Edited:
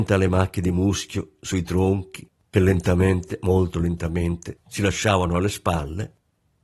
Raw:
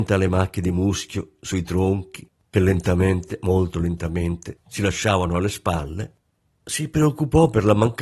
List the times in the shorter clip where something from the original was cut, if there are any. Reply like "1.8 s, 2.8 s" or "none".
none